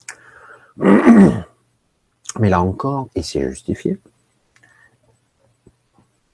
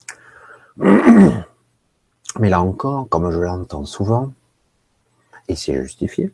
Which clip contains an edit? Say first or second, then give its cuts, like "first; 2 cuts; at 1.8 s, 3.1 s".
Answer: first; 1 cut; at 3.1 s